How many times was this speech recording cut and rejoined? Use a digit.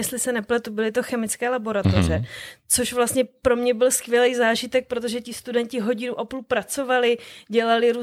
0